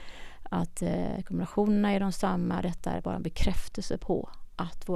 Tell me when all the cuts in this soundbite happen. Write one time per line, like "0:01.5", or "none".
none